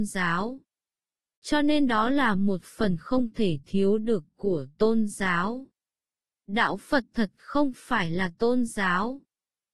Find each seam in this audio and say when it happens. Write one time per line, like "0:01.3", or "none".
none